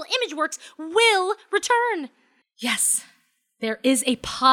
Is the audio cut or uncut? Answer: cut